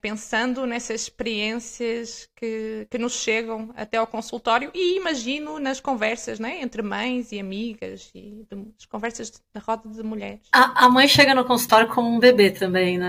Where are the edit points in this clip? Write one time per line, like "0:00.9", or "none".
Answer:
none